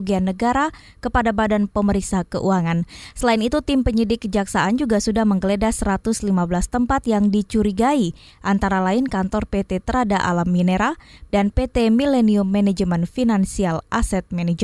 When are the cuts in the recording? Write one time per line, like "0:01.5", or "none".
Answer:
0:11.3

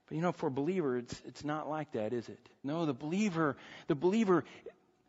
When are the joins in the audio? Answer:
0:02.6

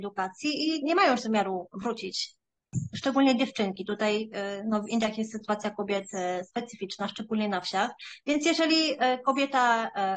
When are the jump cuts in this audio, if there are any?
none

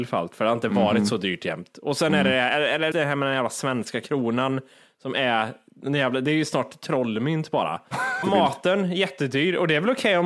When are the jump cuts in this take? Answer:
0:02.9
0:08.2

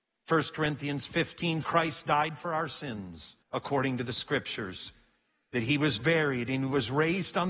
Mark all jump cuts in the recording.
0:01.6
0:03.4

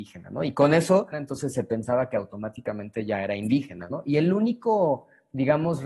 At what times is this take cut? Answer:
0:01.1
0:03.9

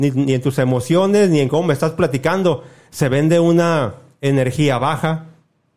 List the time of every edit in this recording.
none

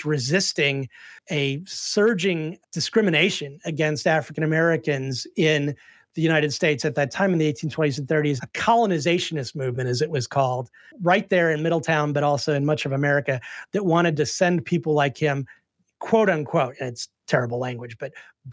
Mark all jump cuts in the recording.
0:08.4

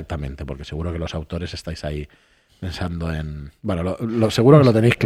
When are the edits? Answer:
none

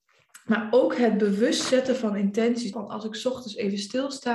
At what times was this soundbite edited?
0:02.7

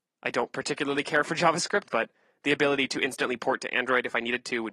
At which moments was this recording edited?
0:01.8

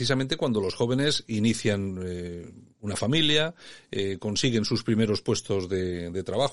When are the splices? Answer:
none

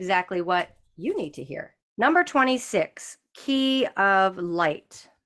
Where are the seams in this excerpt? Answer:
0:01.8

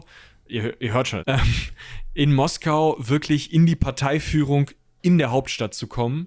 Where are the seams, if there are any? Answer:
0:01.2

